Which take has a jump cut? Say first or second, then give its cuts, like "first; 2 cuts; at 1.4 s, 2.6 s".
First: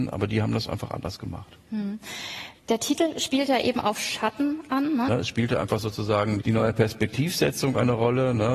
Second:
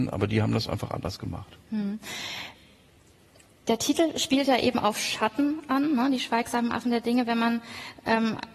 first; 3 cuts; at 2.6 s, 5.1 s, 6.4 s